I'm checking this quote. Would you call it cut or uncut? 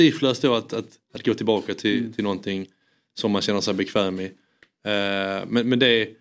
uncut